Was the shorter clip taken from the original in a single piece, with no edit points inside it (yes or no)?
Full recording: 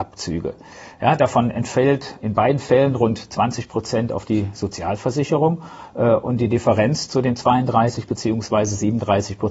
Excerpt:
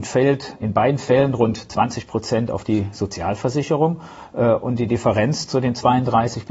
yes